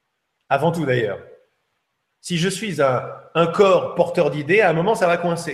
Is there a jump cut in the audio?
no; 0 cuts

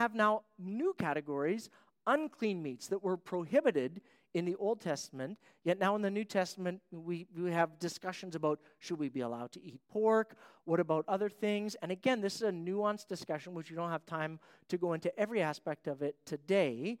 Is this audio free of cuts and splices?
yes; 0 cuts

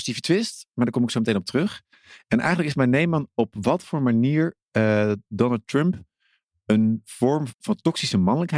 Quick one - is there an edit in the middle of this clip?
yes; 1 cut; at 7.5 s

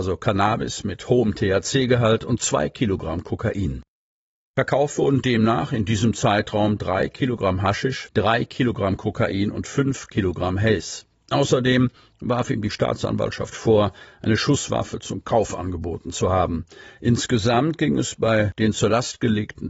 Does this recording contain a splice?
yes; 1 cut; at 8.1 s

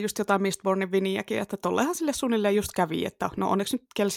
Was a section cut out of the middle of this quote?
no; 0 cuts

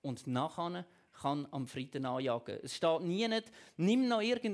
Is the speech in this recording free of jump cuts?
yes; 0 cuts

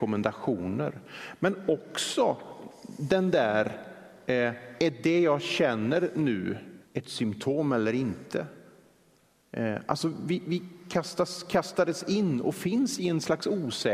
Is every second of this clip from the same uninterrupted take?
no; 1 cut; at 6.8 s

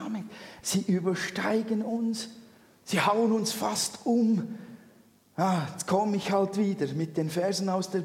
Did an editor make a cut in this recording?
no; 0 cuts

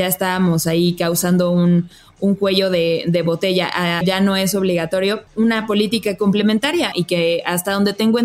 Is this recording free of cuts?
no; 3 cuts; at 4.0 s, 5.3 s, 6.9 s

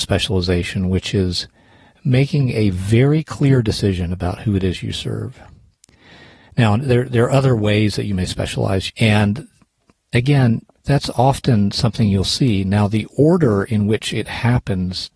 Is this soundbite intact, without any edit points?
no; 2 cuts; at 8.9 s, 10.8 s

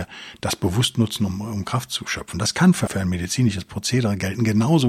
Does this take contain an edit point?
yes; 1 cut; at 2.9 s

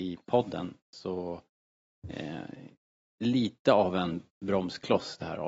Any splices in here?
no; 0 cuts

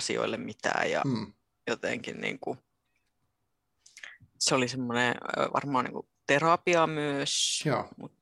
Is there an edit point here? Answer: no; 0 cuts

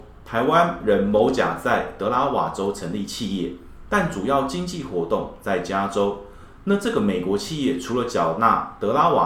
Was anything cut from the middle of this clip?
no; 0 cuts

